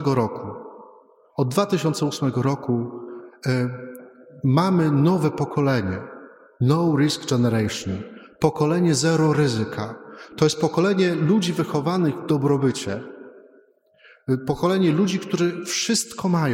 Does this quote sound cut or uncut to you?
uncut